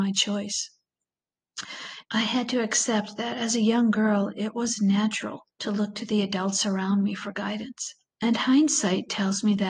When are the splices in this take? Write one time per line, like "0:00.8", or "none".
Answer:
0:02.0
0:05.5
0:08.1